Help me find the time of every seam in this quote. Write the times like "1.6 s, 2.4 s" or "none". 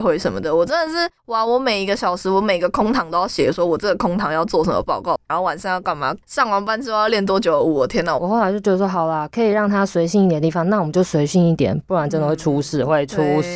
8.2 s, 11.8 s